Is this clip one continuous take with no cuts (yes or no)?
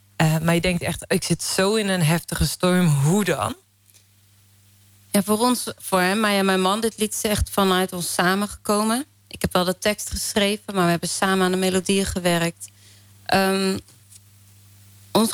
no